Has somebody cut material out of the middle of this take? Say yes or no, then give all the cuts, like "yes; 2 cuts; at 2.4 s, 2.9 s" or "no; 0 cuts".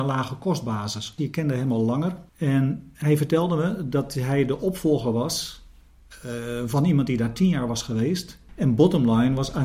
yes; 3 cuts; at 1.2 s, 2.3 s, 8.5 s